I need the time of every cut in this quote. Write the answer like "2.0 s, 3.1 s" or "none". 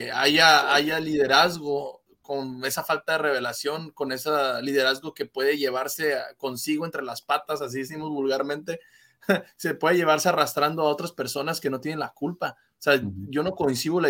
none